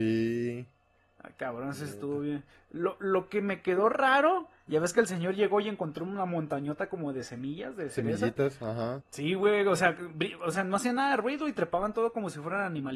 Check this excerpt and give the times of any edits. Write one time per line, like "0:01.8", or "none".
0:09.0